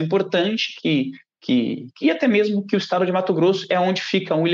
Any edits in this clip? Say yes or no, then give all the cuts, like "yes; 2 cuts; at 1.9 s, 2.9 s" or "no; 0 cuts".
yes; 1 cut; at 2.0 s